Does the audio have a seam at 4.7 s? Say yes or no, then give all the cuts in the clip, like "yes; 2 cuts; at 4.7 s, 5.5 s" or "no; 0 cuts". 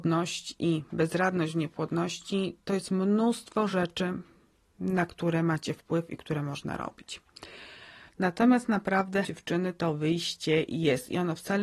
no; 2 cuts; at 8.1 s, 9.2 s